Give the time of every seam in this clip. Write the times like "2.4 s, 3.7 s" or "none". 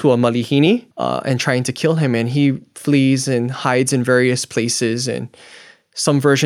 0.9 s